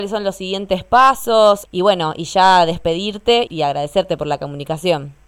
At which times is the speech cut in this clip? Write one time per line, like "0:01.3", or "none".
0:01.6
0:03.5